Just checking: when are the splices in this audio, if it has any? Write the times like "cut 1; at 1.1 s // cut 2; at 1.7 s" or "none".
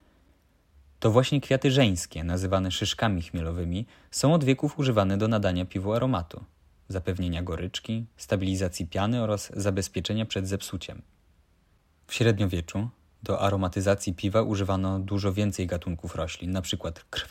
none